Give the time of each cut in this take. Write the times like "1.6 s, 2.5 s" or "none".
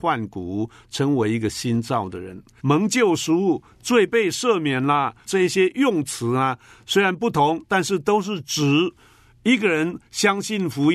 2.6 s, 5.2 s